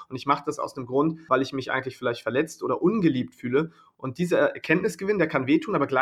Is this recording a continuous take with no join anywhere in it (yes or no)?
no